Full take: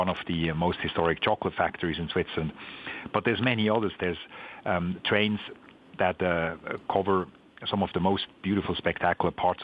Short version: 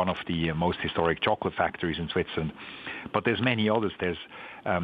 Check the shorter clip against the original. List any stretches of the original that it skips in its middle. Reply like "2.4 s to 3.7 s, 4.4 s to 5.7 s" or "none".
none